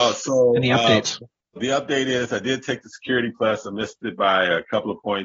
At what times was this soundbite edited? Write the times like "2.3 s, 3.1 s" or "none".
1.6 s